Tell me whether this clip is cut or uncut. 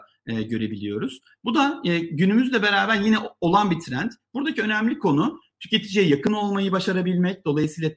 uncut